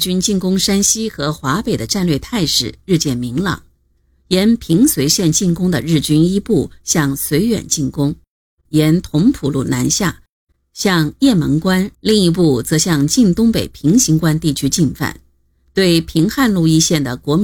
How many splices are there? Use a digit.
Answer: 2